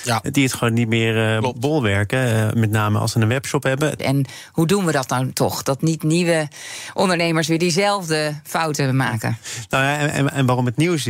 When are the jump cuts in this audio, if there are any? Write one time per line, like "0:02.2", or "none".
0:04.0